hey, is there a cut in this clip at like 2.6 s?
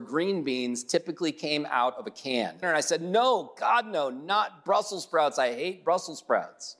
yes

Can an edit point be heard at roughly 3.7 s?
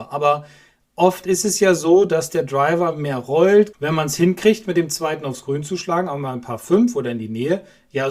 yes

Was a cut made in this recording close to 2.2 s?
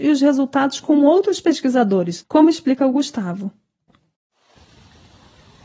yes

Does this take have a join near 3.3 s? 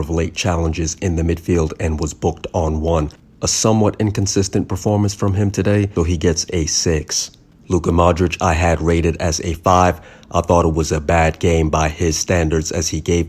no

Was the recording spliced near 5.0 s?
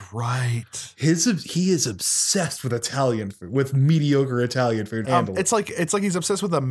yes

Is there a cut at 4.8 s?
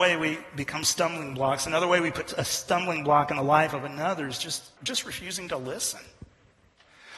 yes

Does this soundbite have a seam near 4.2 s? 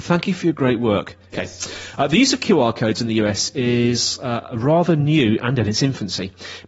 no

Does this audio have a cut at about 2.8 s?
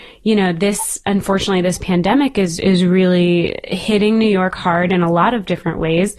no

